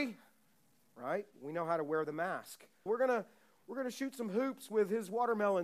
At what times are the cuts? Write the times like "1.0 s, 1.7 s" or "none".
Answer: 2.9 s